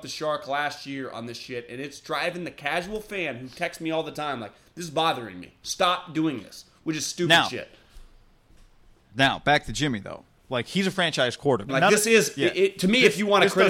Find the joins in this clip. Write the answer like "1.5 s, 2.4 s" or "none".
11.7 s